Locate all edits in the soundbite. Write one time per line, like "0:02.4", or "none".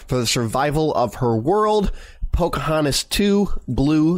none